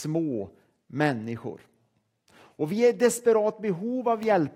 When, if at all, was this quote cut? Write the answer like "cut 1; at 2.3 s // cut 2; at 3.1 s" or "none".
cut 1; at 2.3 s